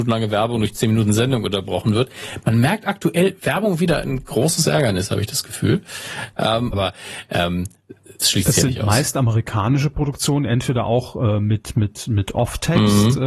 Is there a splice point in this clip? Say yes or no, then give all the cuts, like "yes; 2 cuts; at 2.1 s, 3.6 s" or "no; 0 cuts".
yes; 1 cut; at 6.7 s